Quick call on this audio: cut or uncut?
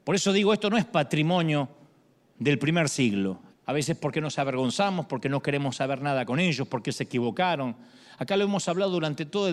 cut